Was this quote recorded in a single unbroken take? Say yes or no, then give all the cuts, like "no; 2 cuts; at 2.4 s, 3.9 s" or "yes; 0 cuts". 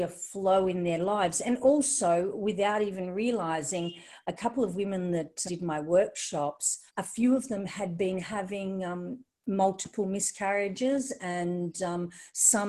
no; 2 cuts; at 5.5 s, 6.9 s